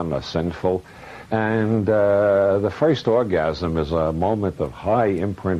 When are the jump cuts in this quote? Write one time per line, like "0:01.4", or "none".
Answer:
0:01.3